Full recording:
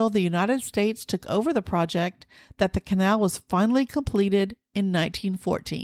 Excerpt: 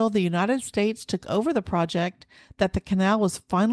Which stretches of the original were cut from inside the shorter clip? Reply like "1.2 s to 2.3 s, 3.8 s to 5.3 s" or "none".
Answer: none